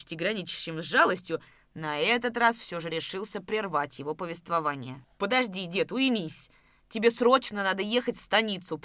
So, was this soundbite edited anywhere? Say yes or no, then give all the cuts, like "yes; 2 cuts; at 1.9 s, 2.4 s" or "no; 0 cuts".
no; 0 cuts